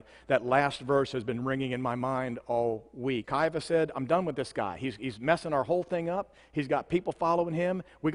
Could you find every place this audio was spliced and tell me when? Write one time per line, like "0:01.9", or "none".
0:03.2